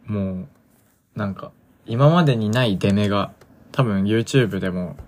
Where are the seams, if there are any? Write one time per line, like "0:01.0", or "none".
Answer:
0:03.5